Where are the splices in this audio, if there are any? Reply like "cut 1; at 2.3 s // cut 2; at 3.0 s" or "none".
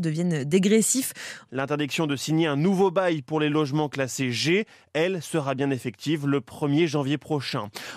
cut 1; at 1.5 s

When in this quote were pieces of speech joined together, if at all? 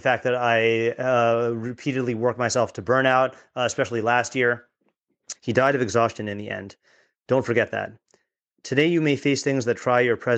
cut 1; at 5.3 s

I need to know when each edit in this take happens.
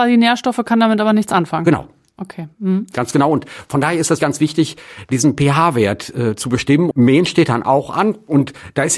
cut 1; at 4.2 s // cut 2; at 6.9 s

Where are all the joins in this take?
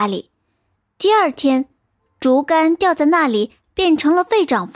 none

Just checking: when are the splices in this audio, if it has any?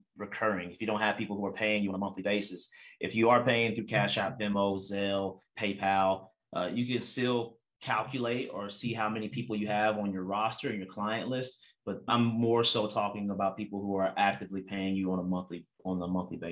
cut 1; at 12.1 s

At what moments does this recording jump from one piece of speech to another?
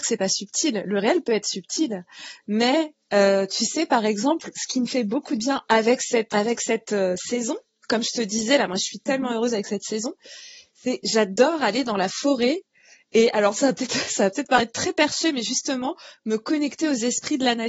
cut 1; at 6.3 s

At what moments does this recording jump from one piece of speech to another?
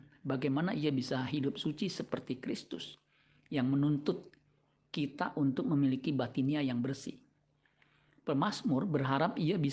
none

